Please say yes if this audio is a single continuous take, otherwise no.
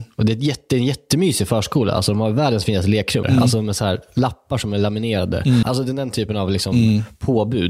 no